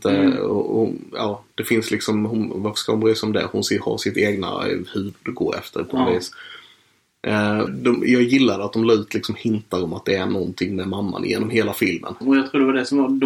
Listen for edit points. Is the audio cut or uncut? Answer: cut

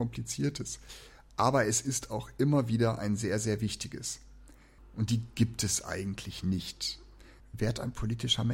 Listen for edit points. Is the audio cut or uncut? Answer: cut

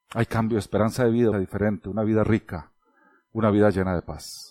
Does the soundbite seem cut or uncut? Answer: cut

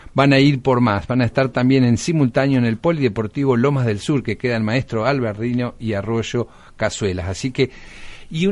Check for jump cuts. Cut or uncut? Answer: uncut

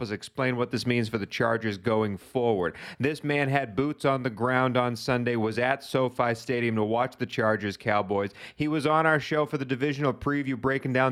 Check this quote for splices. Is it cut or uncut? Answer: uncut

